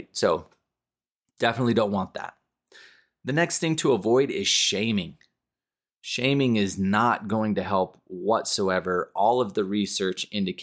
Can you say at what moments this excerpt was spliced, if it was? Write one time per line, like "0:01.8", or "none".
none